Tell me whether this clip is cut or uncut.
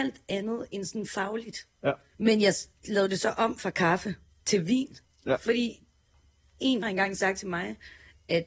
cut